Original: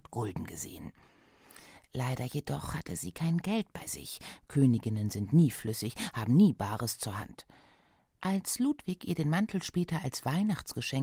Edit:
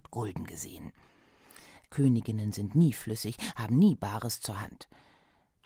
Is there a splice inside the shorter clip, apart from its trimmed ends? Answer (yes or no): yes